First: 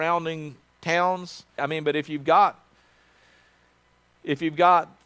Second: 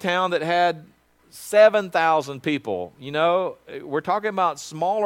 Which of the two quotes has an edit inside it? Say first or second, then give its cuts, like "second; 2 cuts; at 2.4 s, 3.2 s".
first; 1 cut; at 1.6 s